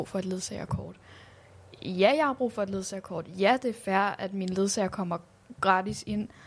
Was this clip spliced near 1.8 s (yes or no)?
no